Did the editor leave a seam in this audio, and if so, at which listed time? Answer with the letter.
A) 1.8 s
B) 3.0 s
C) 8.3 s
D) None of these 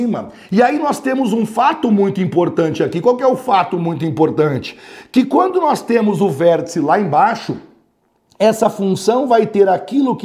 D